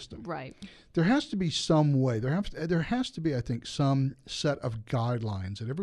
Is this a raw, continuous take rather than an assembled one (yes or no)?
yes